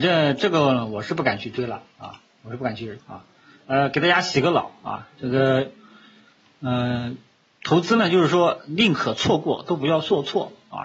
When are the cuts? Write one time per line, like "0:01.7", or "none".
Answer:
0:03.0

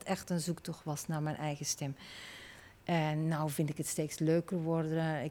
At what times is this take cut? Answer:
0:02.8

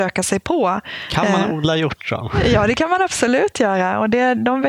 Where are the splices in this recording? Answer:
none

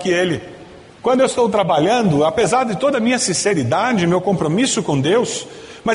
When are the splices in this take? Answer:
0:01.0

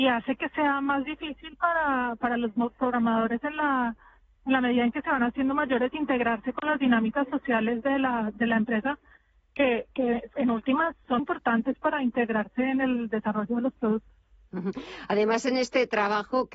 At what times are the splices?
0:11.2

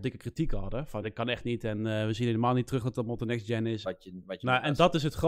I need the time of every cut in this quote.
0:01.0
0:03.8

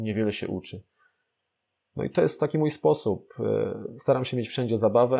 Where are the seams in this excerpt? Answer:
none

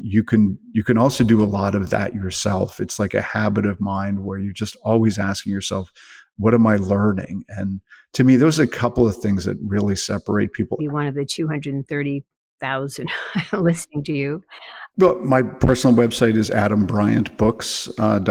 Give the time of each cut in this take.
0:10.8
0:14.9

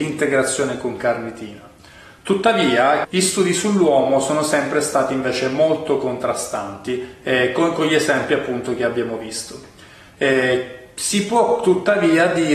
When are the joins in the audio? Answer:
0:03.0

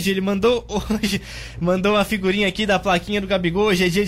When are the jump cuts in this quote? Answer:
none

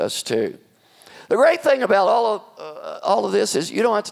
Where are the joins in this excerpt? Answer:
none

